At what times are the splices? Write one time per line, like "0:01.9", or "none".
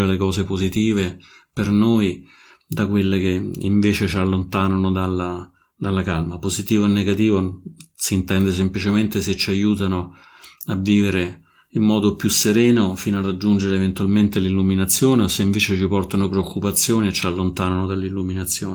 none